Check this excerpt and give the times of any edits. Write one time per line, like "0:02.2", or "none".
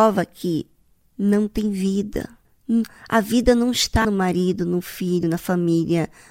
none